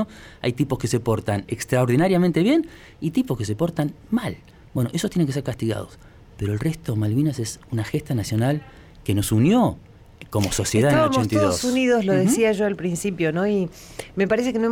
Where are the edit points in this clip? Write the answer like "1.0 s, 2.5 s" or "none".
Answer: none